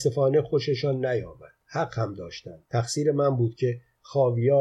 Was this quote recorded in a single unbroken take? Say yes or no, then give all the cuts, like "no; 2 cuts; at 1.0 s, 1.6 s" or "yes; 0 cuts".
no; 2 cuts; at 1.6 s, 2.7 s